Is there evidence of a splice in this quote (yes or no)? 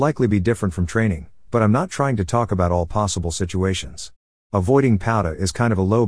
no